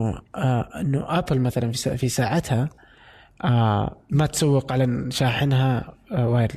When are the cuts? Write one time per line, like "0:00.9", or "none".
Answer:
none